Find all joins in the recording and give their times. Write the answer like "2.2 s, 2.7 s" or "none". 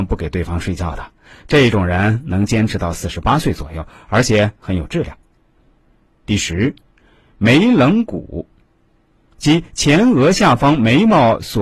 none